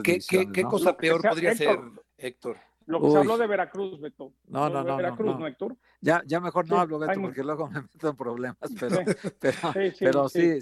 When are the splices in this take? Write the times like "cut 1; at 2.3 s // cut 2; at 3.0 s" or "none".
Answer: cut 1; at 2.1 s